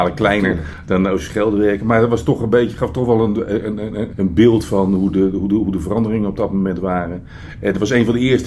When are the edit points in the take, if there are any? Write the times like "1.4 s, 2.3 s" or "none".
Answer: 4.1 s